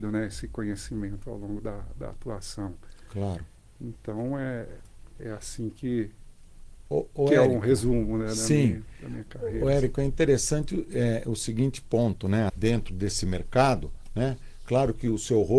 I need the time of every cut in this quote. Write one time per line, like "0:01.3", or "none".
0:12.5